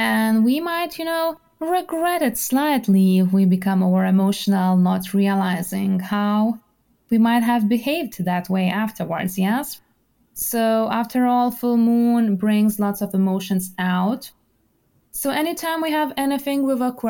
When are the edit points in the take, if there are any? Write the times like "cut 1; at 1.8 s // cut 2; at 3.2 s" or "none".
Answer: cut 1; at 10.3 s // cut 2; at 15.1 s